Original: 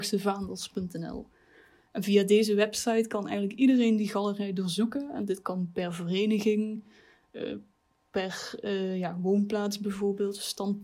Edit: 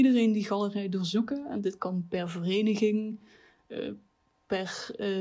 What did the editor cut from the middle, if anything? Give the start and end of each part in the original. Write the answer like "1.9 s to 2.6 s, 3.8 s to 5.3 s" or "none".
none